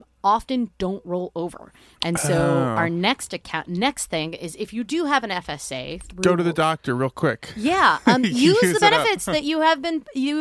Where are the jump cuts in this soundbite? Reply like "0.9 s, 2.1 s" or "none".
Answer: none